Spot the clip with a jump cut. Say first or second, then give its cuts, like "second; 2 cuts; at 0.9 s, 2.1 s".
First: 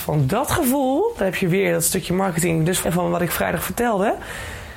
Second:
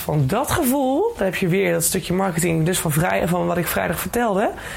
first; 1 cut; at 2.8 s